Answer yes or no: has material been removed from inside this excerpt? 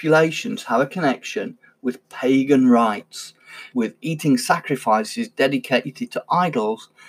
yes